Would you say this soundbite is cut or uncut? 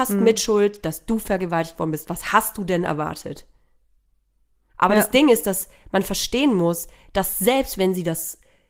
uncut